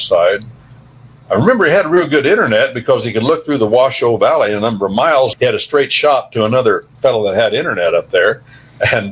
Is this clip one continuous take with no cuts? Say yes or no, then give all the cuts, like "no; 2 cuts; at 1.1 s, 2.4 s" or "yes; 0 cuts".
no; 2 cuts; at 5.3 s, 6.9 s